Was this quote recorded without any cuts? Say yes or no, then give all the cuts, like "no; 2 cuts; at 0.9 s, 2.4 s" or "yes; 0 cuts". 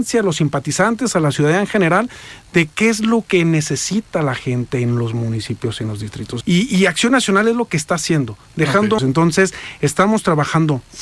no; 2 cuts; at 6.4 s, 9.0 s